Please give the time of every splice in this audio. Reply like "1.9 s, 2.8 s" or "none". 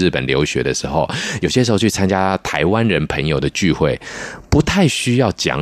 none